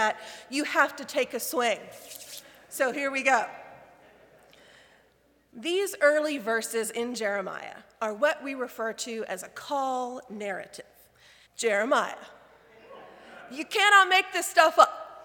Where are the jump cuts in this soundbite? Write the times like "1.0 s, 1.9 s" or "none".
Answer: 11.5 s